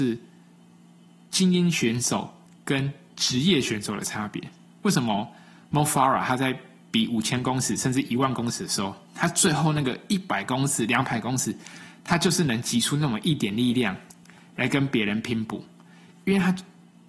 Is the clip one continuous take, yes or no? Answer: yes